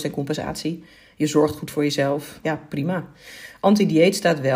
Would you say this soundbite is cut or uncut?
cut